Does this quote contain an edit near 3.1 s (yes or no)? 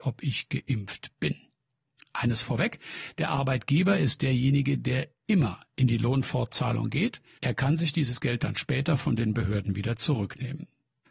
no